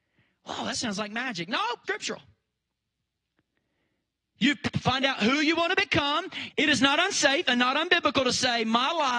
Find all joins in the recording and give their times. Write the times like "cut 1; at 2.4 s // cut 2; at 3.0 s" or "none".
cut 1; at 1.8 s // cut 2; at 6.5 s